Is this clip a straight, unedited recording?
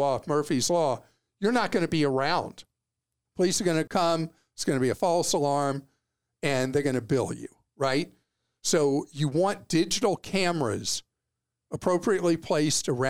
yes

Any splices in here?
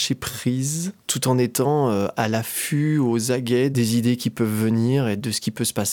yes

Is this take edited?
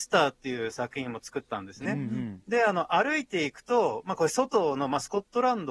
yes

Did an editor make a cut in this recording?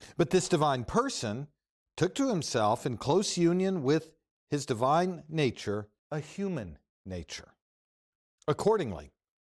yes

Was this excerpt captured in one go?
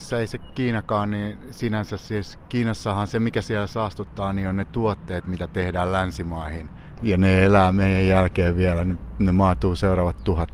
no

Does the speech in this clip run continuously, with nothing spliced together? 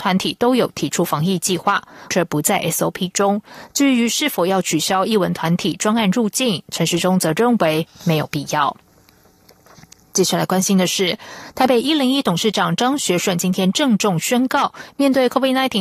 no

